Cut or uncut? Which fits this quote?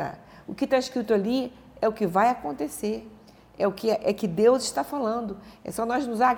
uncut